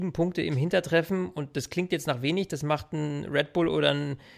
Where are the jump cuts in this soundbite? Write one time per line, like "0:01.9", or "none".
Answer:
none